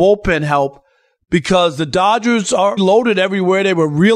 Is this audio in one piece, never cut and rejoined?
no; 1 cut; at 2.8 s

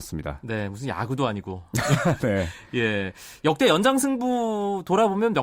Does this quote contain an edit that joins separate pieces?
no; 0 cuts

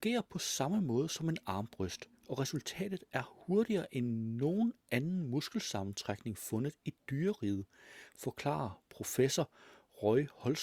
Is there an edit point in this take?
no; 0 cuts

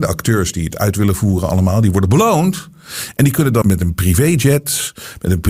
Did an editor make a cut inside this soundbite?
yes; 1 cut; at 3.6 s

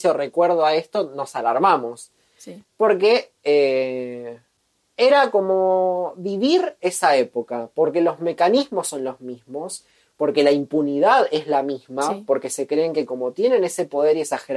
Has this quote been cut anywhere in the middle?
yes; 1 cut; at 2.6 s

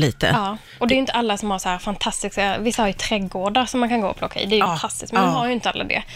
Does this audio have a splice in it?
yes; 1 cut; at 4.7 s

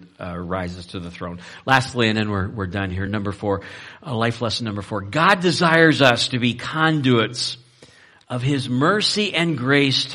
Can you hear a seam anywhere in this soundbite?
no; 0 cuts

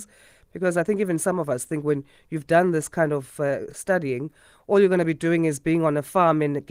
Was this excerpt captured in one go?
yes; 0 cuts

